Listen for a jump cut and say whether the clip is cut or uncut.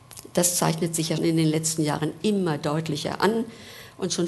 cut